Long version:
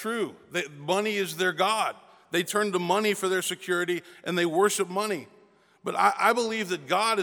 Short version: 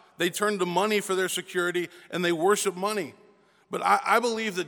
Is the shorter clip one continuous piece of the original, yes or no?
yes